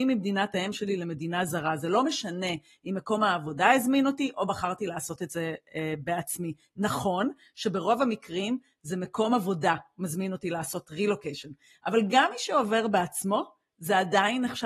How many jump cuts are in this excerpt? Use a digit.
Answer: 0